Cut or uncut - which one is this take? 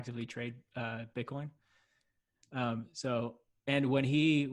uncut